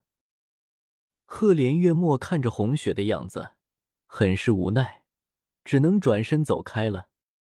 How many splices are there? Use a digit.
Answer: 0